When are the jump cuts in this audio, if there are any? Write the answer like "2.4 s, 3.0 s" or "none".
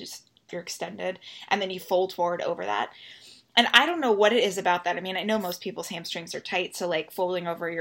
none